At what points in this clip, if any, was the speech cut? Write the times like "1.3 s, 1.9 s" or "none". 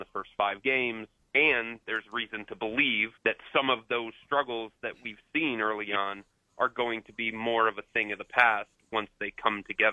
1.2 s, 3.2 s